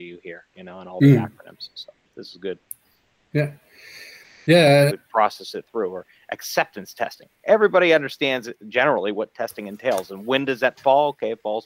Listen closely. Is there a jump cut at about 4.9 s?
yes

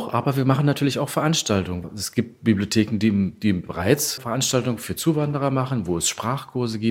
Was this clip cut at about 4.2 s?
yes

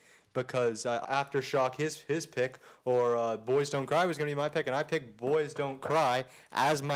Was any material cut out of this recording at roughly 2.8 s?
no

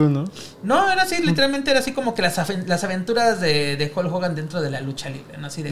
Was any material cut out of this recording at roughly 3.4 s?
no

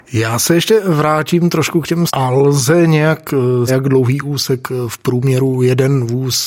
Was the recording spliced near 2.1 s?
yes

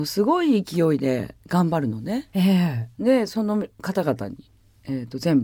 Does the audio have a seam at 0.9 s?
no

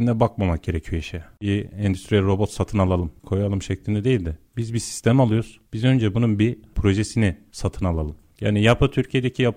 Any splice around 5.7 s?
no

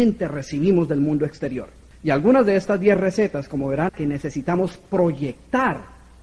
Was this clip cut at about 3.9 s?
yes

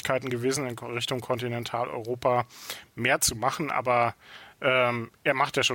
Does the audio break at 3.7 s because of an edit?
no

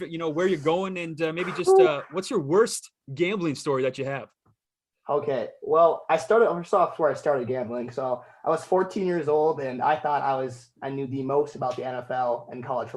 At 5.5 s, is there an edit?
no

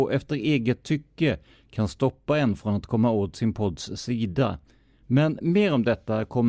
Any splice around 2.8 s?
no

